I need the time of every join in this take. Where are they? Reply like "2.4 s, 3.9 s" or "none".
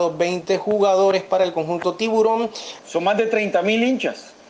2.8 s